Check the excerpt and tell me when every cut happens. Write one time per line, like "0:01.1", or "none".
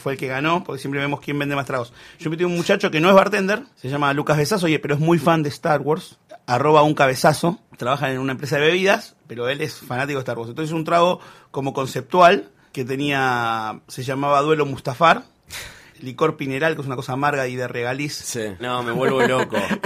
0:15.9
0:18.6